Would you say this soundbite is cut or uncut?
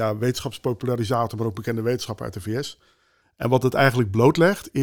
cut